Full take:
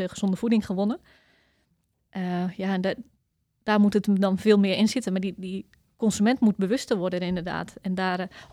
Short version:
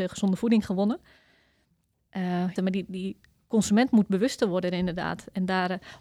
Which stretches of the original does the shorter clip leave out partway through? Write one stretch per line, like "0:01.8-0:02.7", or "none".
0:02.6-0:05.0